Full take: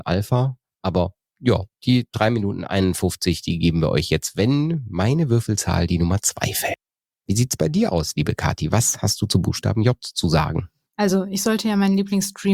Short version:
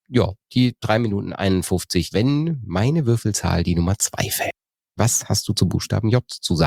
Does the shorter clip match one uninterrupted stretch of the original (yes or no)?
no